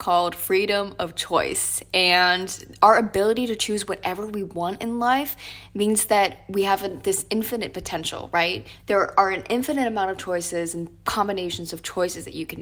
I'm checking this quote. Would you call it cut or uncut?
uncut